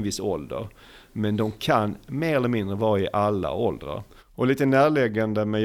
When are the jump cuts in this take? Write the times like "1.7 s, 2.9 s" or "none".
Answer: 4.2 s